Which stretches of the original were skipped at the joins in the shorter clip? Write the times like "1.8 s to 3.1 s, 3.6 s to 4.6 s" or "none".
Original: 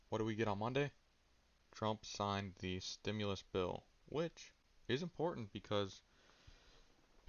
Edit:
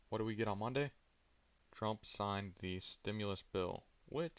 none